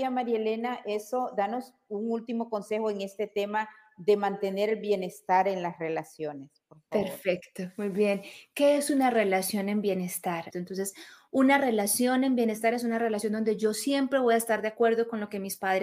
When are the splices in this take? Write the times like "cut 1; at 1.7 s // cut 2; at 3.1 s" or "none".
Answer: cut 1; at 10.5 s